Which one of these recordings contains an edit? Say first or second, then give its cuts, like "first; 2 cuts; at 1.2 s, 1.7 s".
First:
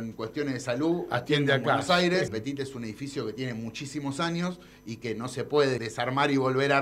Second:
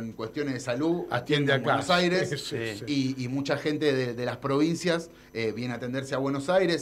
first; 2 cuts; at 2.3 s, 5.8 s